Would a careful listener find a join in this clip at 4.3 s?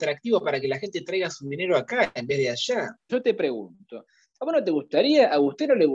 no; 1 cut; at 3.1 s

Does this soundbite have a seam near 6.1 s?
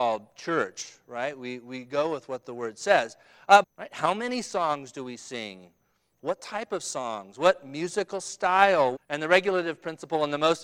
no; 2 cuts; at 3.6 s, 9.0 s

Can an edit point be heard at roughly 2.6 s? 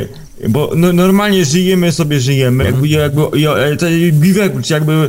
yes; 1 cut; at 2.6 s

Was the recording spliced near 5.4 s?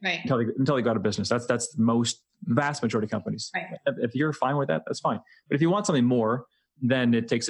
no; 0 cuts

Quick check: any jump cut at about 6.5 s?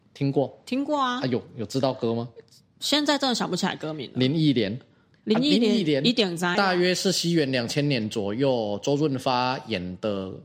yes; 1 cut; at 6.5 s

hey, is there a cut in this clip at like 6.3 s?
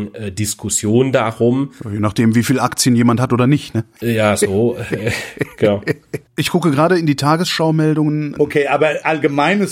yes; 2 cuts; at 6.3 s, 8.4 s

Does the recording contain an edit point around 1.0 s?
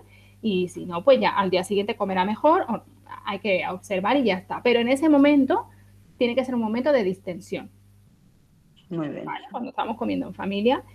no; 1 cut; at 9.5 s

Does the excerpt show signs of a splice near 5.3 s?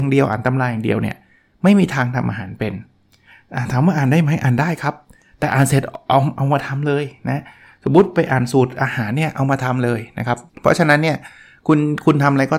no; 1 cut; at 10.5 s

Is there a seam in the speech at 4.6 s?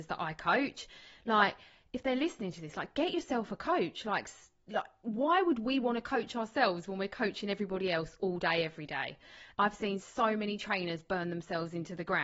no; 1 cut; at 9.5 s

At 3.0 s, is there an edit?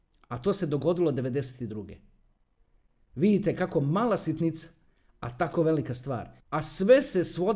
no; 1 cut; at 6.4 s

